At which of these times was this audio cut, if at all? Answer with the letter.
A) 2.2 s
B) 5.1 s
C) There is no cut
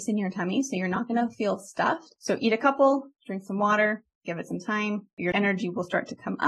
A